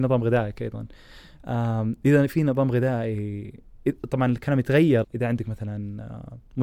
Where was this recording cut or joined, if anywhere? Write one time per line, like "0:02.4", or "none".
0:05.0